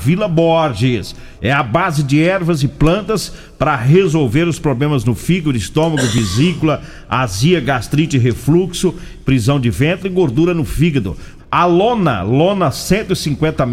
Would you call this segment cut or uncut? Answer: cut